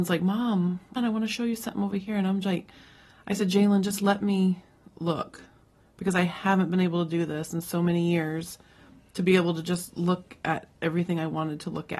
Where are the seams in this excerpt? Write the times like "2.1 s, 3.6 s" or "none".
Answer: 1.0 s